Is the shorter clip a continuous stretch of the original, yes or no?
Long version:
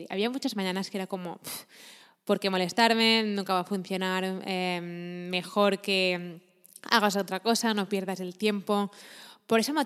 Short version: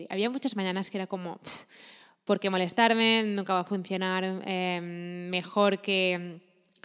yes